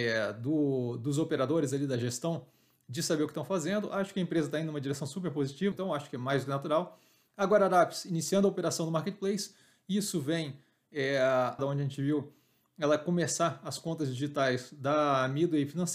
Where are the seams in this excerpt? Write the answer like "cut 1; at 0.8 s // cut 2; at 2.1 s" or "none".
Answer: cut 1; at 5.7 s // cut 2; at 11.6 s